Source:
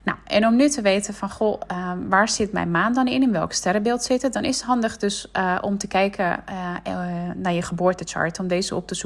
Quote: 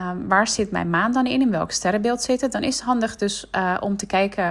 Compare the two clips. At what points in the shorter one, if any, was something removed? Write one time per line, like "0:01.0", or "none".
none

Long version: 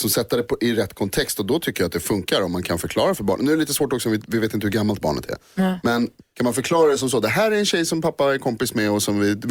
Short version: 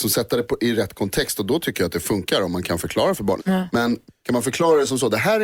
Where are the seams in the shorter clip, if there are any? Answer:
0:03.4

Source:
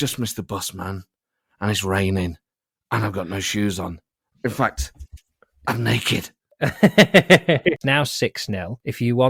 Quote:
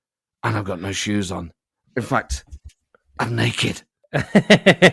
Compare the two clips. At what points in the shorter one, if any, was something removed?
none

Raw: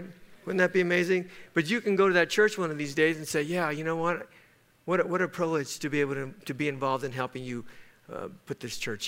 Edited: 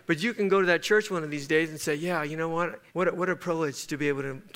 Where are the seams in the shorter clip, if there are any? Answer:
0:02.9

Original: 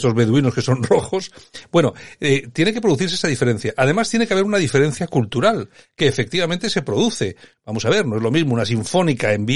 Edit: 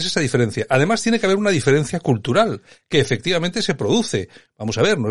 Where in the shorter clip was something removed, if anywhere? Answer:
none

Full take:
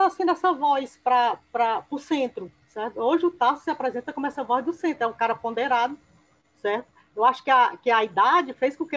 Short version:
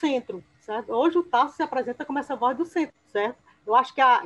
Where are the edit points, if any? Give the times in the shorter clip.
0:02.9

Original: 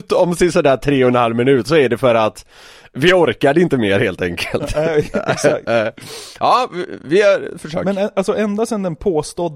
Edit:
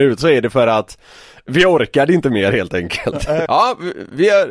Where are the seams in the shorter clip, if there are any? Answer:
0:03.5

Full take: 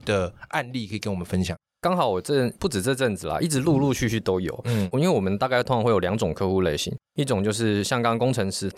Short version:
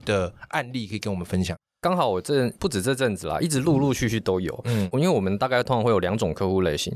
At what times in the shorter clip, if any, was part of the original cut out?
none

